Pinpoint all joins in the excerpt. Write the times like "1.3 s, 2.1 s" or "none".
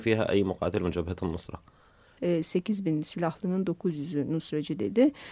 2.2 s